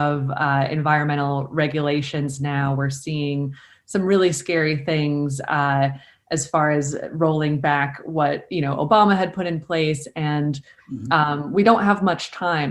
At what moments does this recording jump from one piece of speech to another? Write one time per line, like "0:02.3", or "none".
none